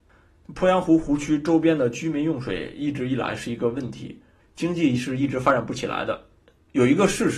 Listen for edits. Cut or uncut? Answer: cut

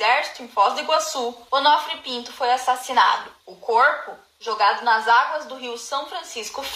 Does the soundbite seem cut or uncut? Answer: uncut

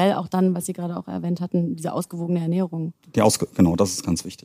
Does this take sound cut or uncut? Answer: uncut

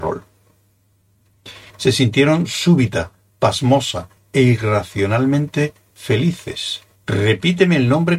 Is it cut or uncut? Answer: cut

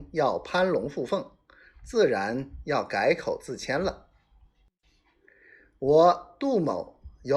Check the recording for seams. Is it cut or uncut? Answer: uncut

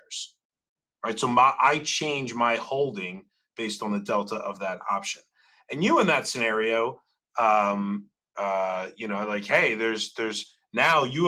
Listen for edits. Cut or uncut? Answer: uncut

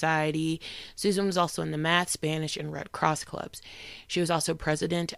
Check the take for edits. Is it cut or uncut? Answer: uncut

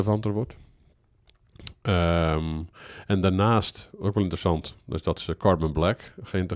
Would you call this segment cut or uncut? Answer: uncut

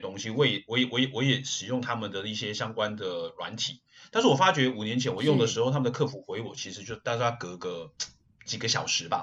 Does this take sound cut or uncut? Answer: uncut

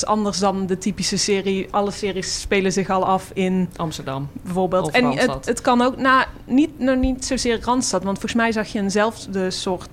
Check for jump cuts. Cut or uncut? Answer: uncut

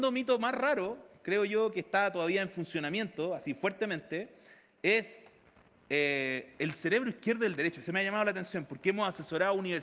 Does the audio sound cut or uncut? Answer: uncut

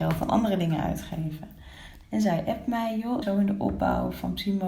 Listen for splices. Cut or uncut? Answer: cut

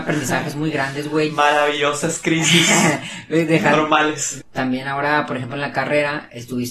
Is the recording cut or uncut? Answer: cut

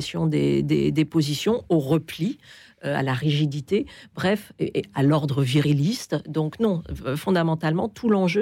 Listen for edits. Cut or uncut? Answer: uncut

